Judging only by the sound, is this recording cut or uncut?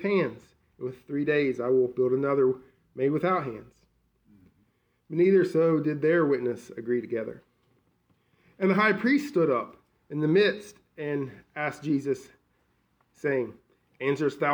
uncut